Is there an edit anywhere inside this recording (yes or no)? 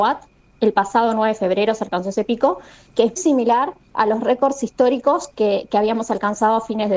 yes